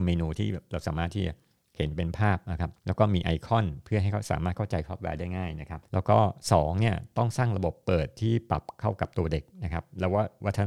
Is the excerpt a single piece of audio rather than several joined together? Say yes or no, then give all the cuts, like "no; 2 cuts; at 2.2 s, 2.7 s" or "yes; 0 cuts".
no; 2 cuts; at 2.8 s, 5.9 s